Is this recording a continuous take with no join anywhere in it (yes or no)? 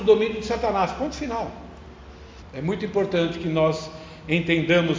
no